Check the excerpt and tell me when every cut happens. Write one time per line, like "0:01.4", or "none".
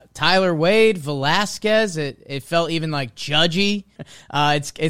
0:04.0